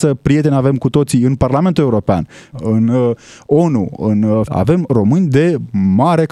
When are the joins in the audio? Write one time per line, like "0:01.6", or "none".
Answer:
0:02.5
0:04.5